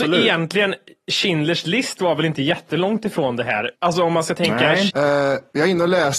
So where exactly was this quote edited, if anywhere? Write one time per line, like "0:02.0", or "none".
0:03.7
0:04.9